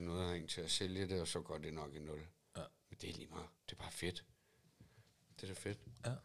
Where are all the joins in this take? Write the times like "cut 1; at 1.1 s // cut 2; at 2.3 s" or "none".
cut 1; at 3.6 s